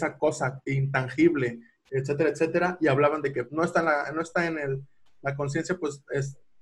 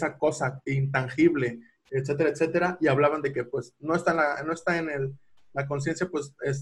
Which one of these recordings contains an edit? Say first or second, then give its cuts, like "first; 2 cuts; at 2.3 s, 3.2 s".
first; 1 cut; at 3.5 s